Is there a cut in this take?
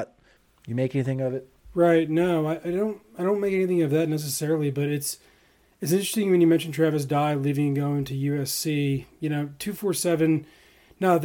no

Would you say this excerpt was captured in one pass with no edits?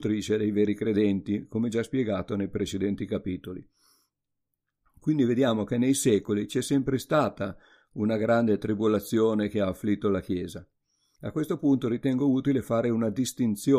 yes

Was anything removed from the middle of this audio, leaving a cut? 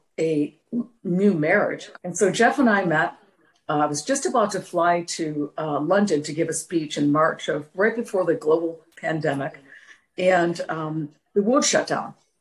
yes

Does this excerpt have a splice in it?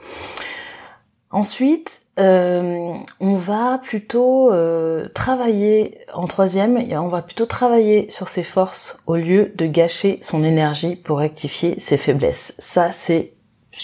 no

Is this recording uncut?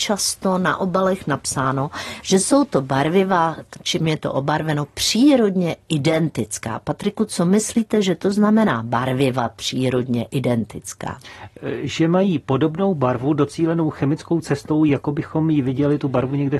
yes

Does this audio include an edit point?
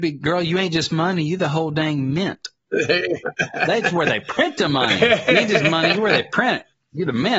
no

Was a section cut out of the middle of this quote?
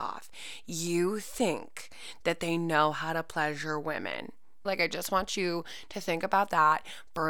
yes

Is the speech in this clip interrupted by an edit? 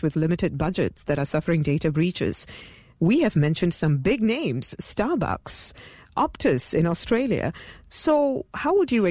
no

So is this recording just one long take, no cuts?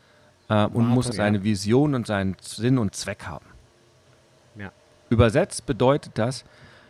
no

